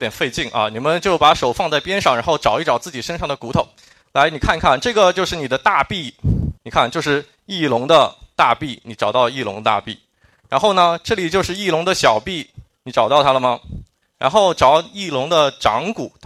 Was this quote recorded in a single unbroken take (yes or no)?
no